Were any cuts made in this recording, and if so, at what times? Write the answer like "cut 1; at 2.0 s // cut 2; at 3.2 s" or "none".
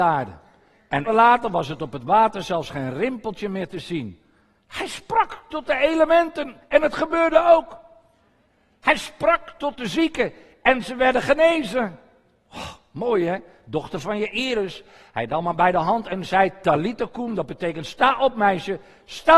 cut 1; at 1.1 s